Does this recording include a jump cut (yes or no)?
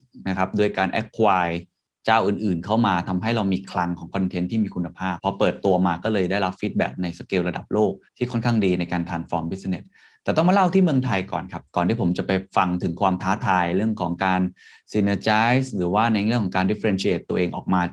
yes